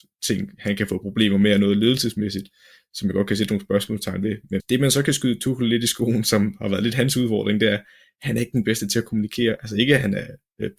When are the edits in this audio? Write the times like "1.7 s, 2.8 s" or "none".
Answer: 4.6 s